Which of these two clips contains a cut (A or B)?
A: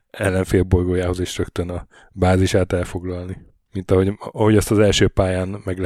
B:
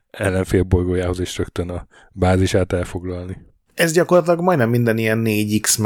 B